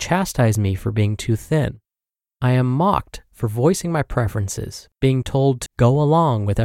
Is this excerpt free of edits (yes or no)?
no